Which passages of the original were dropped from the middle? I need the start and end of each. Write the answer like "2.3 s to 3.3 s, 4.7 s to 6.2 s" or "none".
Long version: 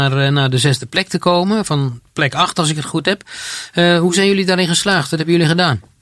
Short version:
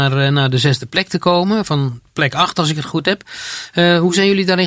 none